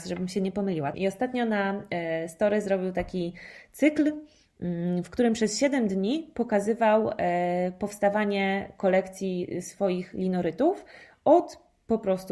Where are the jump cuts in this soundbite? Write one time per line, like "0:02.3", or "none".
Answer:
0:00.9